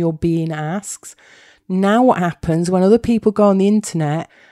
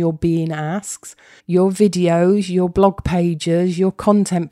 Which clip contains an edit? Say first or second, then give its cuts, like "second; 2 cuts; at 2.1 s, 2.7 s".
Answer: second; 1 cut; at 1.4 s